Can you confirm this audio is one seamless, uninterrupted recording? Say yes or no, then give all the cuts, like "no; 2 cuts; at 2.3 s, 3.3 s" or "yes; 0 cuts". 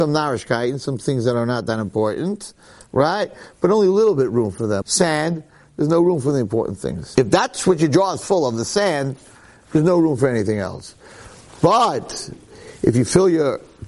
no; 2 cuts; at 4.8 s, 7.2 s